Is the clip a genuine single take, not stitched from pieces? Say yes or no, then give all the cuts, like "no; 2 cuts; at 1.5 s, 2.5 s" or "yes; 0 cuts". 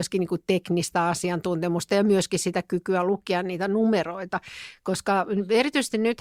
yes; 0 cuts